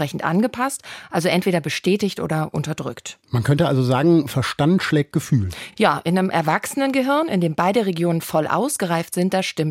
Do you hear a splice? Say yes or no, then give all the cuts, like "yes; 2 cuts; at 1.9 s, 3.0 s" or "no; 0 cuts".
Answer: no; 0 cuts